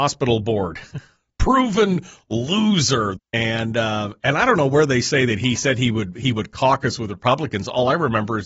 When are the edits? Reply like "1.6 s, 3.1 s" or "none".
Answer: 3.2 s